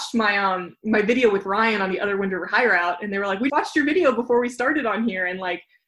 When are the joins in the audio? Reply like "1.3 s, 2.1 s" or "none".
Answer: 3.5 s